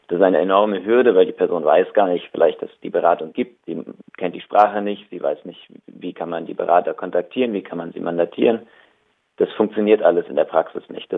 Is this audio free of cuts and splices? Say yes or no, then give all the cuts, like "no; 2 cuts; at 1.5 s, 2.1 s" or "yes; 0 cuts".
no; 1 cut; at 3.6 s